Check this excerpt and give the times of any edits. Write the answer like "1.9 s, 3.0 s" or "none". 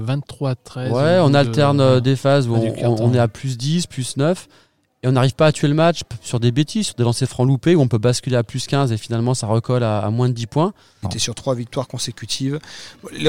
11.0 s